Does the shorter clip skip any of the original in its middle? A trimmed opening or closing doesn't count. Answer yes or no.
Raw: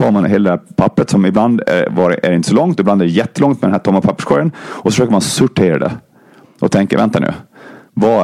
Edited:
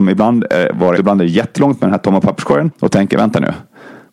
yes